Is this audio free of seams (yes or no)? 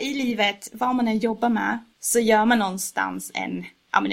no